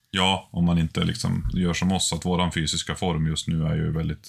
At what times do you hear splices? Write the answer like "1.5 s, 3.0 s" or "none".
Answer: none